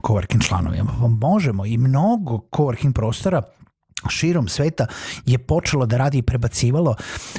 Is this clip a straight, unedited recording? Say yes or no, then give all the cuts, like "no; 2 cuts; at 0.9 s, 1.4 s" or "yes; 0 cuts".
yes; 0 cuts